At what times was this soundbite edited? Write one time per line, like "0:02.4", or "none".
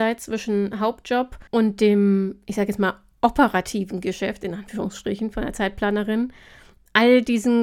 0:01.5